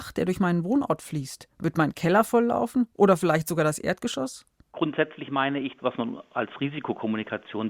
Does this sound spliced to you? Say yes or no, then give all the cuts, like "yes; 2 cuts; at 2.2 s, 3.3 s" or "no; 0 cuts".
yes; 1 cut; at 5.8 s